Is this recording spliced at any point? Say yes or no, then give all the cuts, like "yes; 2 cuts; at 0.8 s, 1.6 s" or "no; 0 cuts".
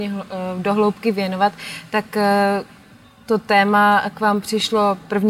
no; 0 cuts